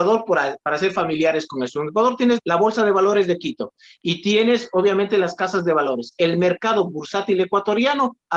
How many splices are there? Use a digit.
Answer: 1